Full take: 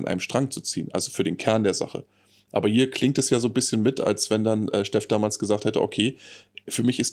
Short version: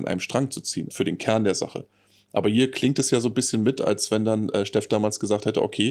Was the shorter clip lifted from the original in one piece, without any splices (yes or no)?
no